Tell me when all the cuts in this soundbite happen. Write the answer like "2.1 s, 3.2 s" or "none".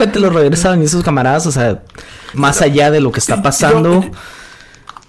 2.3 s